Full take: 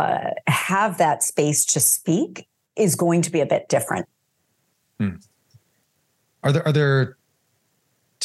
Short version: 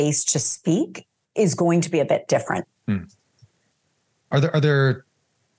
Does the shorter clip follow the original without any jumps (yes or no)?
no